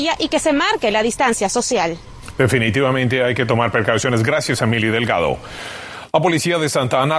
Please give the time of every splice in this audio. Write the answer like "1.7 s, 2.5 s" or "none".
none